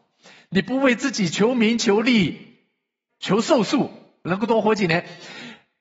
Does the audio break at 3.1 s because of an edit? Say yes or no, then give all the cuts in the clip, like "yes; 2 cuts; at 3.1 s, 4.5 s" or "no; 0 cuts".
yes; 1 cut; at 3.1 s